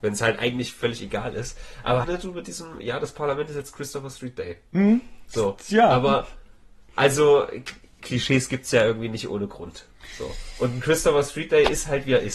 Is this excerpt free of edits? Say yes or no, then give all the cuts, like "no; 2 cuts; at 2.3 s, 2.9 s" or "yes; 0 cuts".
no; 2 cuts; at 2.0 s, 8.0 s